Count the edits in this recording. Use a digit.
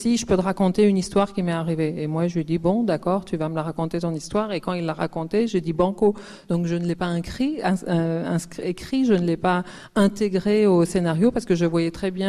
0